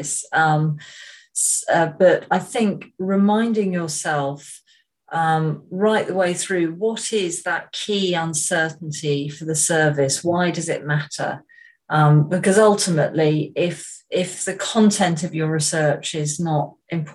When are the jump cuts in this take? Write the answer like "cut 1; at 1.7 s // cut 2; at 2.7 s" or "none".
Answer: none